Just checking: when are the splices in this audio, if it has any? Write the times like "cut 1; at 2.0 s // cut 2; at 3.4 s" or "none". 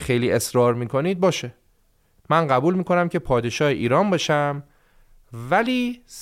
none